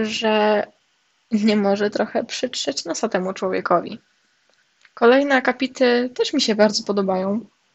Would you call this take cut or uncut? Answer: uncut